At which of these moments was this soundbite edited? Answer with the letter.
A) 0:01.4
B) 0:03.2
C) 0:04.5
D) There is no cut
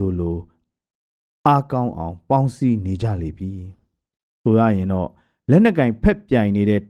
D